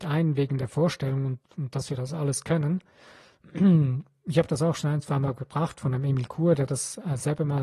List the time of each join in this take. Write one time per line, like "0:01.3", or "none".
none